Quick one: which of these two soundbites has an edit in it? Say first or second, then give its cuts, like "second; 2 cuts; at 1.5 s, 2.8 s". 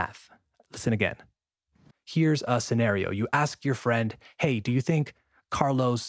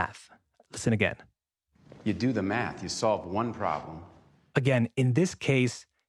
first; 1 cut; at 1.9 s